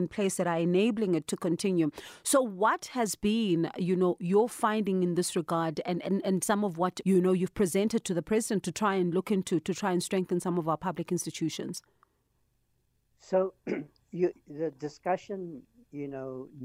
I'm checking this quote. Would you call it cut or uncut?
cut